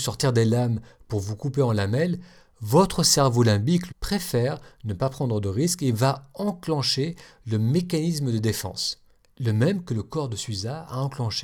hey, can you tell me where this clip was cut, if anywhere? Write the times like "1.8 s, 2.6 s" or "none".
3.9 s